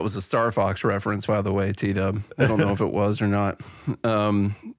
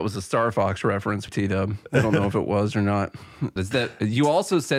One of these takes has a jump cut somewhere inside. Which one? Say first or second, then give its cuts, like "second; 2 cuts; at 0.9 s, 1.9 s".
second; 2 cuts; at 1.3 s, 3.6 s